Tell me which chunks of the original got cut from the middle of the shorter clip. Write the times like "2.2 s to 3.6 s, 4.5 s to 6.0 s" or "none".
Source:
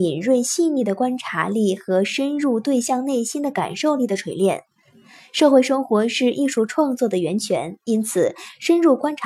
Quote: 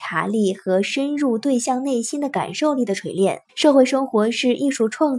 4.7 s to 5.3 s